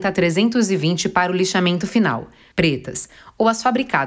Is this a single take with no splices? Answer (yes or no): no